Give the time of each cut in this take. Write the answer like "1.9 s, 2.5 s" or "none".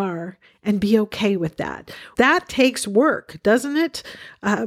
2.1 s

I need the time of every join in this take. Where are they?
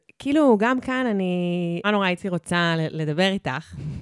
1.8 s

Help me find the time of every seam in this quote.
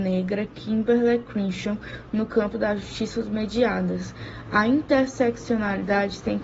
none

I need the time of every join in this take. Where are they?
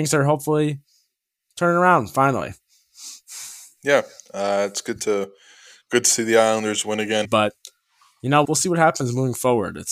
7.2 s, 8.4 s

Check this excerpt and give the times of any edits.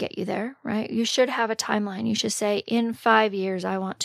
none

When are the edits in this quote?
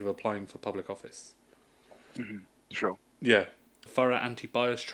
3.9 s

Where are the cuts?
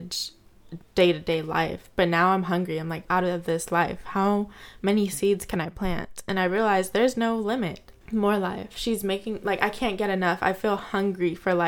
3.0 s, 8.0 s

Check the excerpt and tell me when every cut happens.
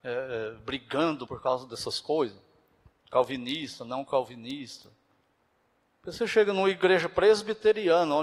1.3 s

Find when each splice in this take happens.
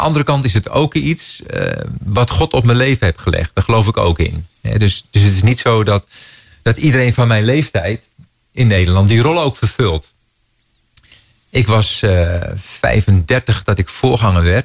4.6 s

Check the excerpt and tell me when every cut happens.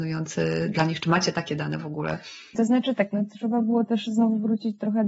none

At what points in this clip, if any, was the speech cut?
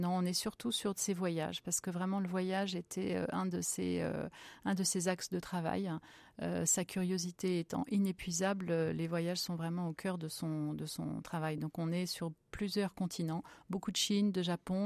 none

